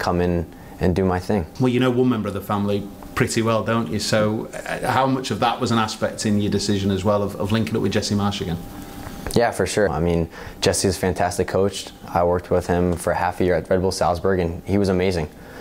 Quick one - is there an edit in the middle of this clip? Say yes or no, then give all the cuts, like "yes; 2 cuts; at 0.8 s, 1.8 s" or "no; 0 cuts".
yes; 1 cut; at 9.9 s